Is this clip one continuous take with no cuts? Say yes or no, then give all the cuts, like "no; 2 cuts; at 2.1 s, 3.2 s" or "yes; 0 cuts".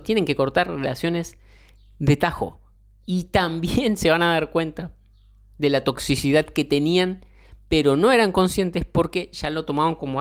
yes; 0 cuts